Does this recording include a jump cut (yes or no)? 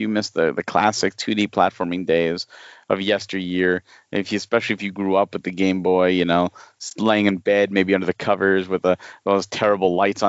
no